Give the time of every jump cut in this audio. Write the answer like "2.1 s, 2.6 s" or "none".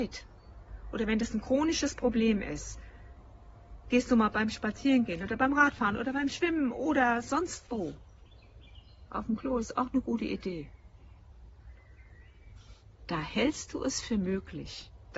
none